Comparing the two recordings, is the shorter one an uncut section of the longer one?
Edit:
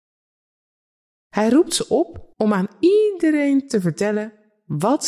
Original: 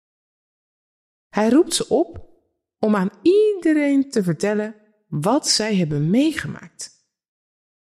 no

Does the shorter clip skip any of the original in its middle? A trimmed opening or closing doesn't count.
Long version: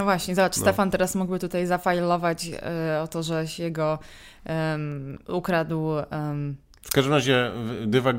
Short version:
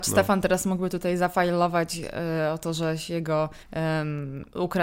yes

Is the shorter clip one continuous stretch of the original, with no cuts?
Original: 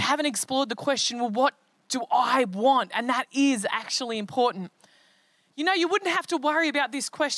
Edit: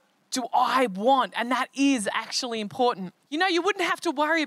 no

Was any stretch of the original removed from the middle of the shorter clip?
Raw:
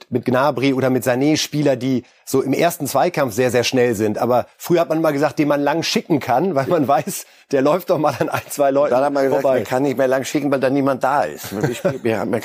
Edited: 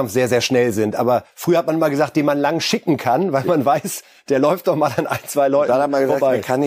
no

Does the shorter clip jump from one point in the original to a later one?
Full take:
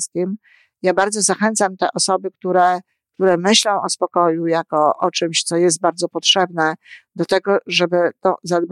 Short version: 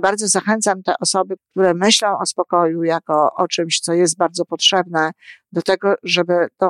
yes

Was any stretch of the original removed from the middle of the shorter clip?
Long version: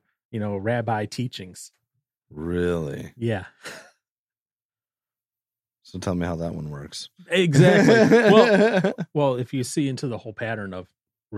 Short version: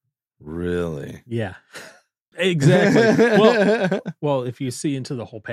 yes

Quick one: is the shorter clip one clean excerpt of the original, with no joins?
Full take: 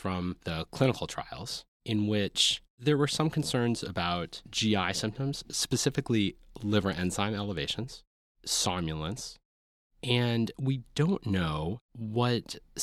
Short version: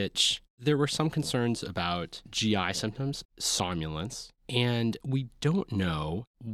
no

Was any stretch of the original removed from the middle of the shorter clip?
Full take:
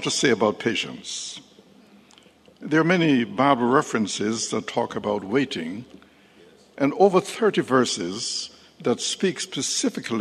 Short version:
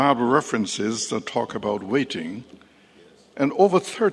no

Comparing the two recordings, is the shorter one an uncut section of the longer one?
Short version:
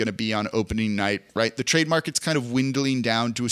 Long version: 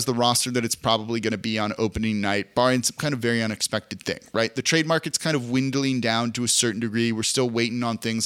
no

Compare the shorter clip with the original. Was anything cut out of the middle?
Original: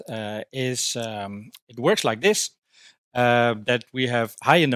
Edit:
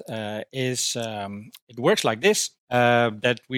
yes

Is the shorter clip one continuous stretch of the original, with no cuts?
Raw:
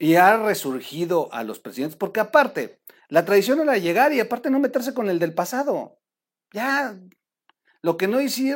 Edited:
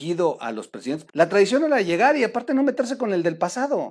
no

